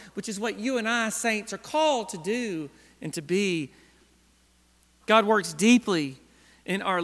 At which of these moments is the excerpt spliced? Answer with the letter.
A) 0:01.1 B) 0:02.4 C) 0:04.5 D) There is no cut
D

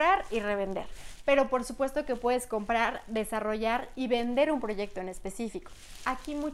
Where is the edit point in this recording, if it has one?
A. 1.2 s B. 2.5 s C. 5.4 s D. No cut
D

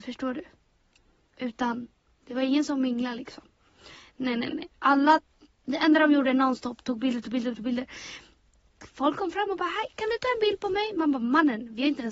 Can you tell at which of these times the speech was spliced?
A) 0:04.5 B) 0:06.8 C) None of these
A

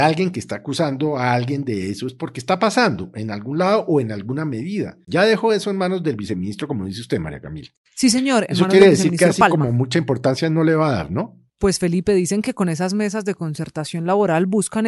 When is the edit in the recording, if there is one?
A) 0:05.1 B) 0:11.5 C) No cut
A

